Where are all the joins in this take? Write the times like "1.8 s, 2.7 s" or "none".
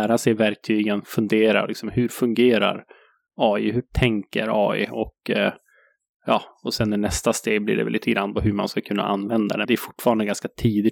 9.6 s